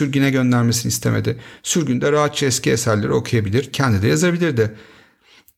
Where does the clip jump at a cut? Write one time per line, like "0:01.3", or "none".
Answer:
0:03.7